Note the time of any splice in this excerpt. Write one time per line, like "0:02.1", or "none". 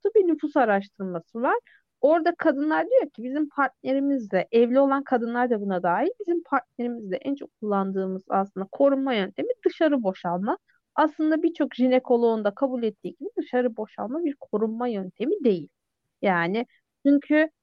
none